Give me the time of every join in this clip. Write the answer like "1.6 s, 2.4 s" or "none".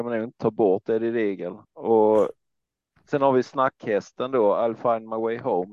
1.6 s